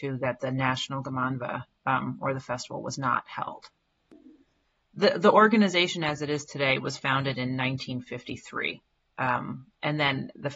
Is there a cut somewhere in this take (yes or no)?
no